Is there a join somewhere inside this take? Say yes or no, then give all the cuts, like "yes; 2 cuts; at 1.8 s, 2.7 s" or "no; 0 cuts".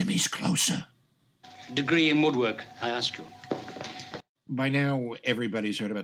yes; 1 cut; at 1.7 s